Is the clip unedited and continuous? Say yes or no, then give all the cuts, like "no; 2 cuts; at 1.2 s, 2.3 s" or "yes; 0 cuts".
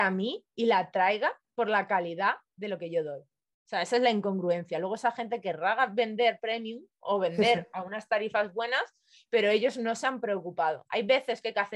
yes; 0 cuts